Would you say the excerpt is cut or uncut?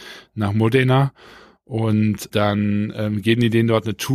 cut